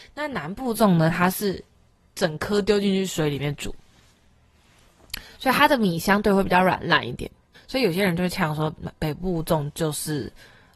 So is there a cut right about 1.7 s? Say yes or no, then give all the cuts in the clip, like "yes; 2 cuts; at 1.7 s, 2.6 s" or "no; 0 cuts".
no; 1 cut; at 7.5 s